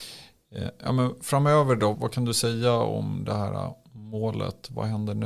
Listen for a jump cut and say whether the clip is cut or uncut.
cut